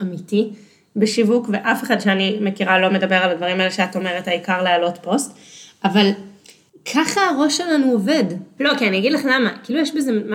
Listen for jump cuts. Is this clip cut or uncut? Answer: cut